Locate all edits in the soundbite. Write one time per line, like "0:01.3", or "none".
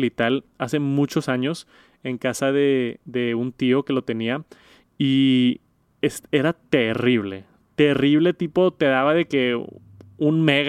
none